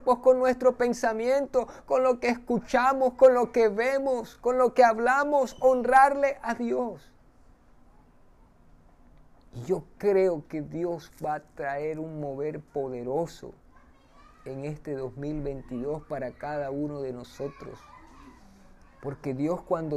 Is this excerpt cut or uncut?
uncut